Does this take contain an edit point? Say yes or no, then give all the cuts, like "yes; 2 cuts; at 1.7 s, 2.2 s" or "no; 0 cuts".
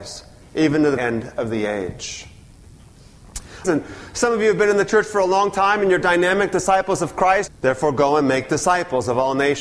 yes; 3 cuts; at 1.0 s, 3.6 s, 7.5 s